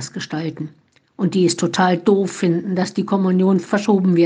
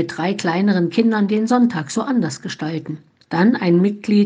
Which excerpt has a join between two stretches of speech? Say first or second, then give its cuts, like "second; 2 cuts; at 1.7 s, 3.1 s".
second; 1 cut; at 3.2 s